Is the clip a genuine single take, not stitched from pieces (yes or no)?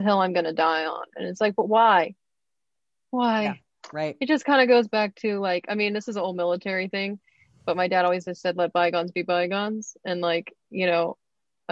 yes